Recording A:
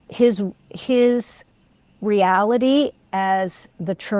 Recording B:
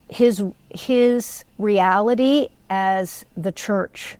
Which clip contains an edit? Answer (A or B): B